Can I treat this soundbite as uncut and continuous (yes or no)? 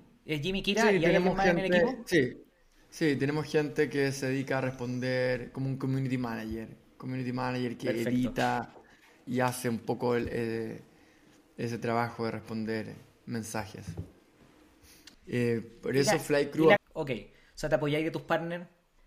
no